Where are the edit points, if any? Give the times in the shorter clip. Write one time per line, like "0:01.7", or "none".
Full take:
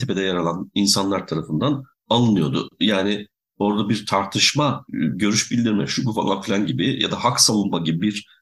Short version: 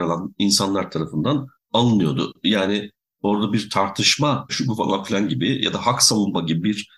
0:04.5